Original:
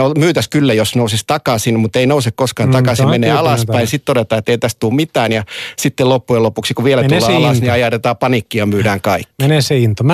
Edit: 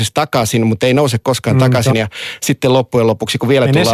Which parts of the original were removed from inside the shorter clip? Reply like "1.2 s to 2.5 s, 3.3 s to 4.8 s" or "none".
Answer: 3.1 s to 5.3 s